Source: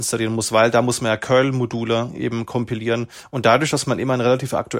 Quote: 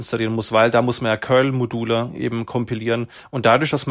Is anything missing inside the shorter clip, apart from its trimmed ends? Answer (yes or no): no